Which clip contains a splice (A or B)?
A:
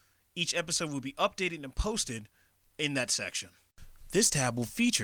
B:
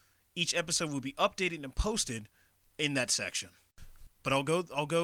B